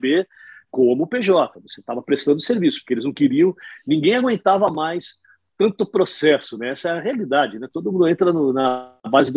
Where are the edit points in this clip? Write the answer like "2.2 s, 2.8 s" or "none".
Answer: none